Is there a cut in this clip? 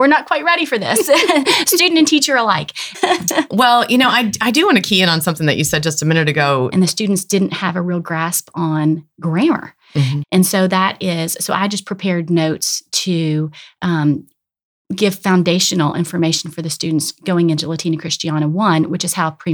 yes; 3 cuts; at 2.9 s, 6.7 s, 10.2 s

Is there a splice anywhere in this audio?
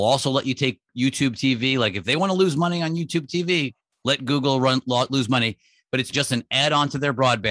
yes; 1 cut; at 6.1 s

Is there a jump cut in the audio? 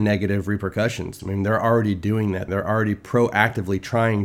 yes; 2 cuts; at 1.2 s, 2.5 s

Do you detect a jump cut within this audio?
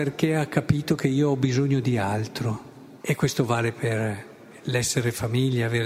yes; 1 cut; at 3.0 s

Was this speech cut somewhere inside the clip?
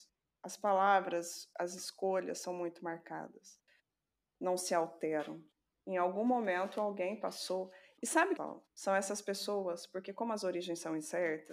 yes; 2 cuts; at 5.7 s, 8.4 s

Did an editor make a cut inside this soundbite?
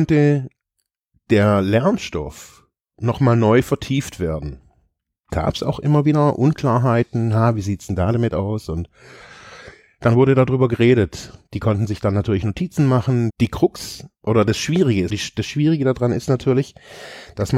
yes; 3 cuts; at 5.3 s, 13.3 s, 15.1 s

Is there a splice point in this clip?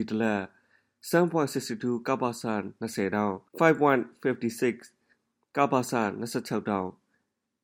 yes; 1 cut; at 3.5 s

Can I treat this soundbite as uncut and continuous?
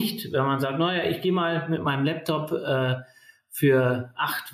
yes; 0 cuts

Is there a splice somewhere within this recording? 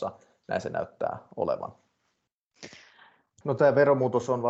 yes; 1 cut; at 3.4 s

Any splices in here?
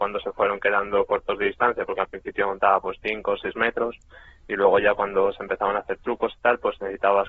no; 0 cuts

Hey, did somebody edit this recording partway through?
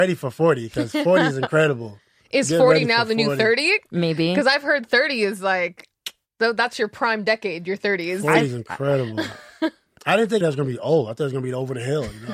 yes; 1 cut; at 10.4 s

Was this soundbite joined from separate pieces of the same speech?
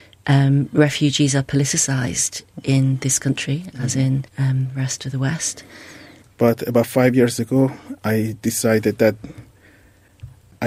yes; 2 cuts; at 4.3 s, 6.2 s

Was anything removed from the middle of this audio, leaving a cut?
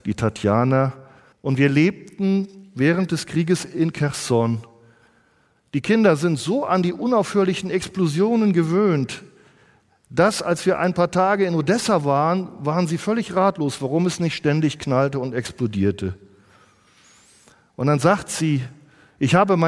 yes; 1 cut; at 1.3 s

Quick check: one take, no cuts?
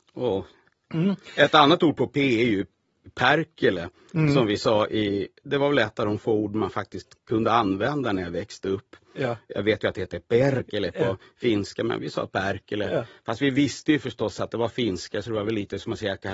yes; 0 cuts

